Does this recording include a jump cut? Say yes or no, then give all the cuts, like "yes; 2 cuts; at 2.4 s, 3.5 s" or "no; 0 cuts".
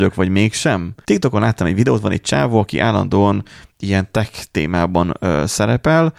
yes; 1 cut; at 1.0 s